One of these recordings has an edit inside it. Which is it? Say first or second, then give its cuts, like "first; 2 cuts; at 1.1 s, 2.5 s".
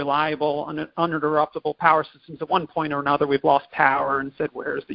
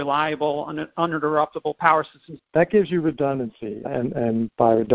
second; 2 cuts; at 2.4 s, 3.9 s